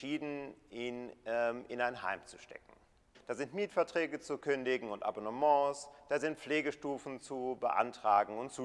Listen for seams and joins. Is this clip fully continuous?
no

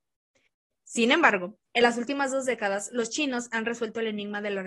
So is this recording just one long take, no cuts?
no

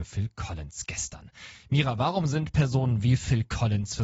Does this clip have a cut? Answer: no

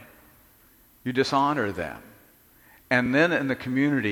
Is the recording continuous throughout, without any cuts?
yes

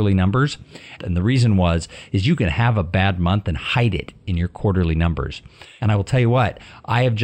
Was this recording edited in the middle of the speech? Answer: yes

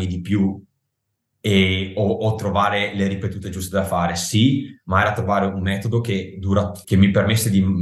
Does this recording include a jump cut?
yes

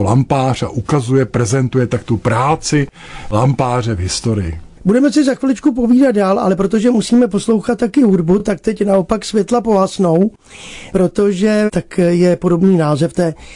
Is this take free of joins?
yes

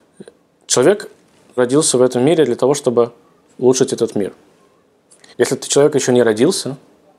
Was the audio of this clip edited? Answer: yes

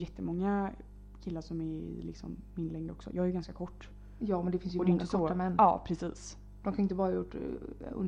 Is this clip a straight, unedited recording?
yes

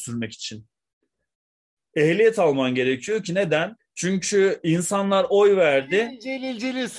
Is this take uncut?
no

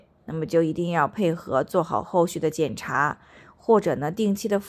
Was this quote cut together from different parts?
no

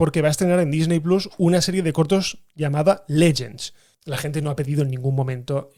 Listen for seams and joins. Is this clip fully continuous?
no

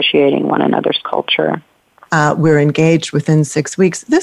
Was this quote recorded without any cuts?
no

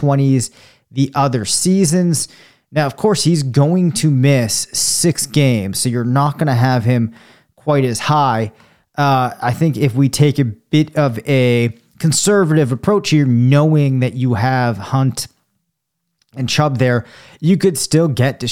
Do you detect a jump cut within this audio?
no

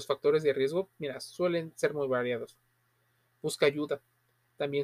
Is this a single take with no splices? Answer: yes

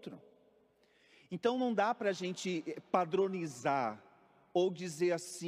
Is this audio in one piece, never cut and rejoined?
yes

